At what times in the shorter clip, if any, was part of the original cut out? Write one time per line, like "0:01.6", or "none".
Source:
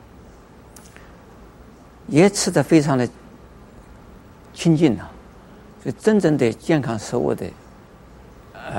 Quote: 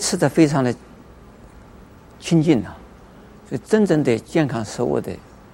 none